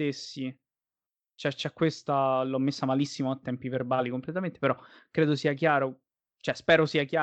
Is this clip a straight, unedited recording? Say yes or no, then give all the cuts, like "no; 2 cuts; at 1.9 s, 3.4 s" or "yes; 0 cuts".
yes; 0 cuts